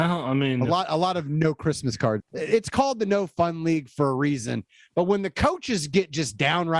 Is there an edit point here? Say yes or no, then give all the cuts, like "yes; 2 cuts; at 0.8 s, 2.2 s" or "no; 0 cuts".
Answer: yes; 1 cut; at 2.2 s